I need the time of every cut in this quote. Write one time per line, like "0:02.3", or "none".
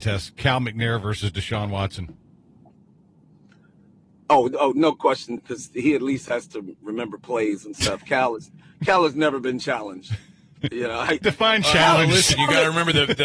0:05.4
0:11.2